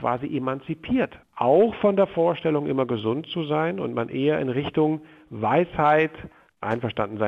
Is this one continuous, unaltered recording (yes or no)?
no